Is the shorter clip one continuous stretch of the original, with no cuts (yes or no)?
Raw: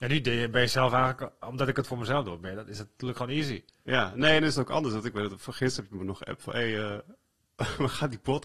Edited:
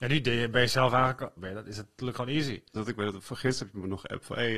no